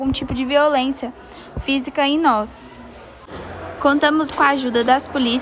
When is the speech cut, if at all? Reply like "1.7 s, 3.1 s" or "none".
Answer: 4.3 s